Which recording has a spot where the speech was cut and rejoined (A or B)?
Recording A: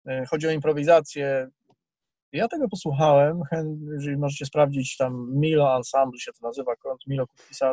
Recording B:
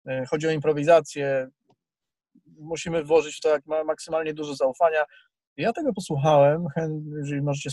A